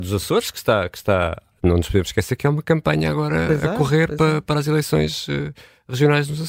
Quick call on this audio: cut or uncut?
uncut